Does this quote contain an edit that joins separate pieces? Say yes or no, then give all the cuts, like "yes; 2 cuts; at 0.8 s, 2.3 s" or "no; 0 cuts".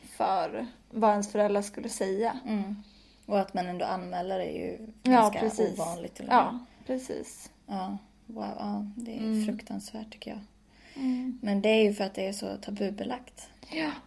no; 0 cuts